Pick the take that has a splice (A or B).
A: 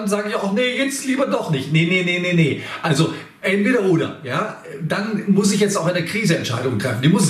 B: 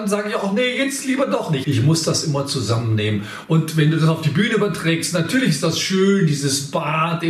B